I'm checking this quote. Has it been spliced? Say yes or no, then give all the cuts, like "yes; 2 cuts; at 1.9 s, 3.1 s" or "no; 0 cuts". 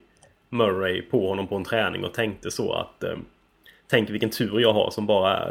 no; 0 cuts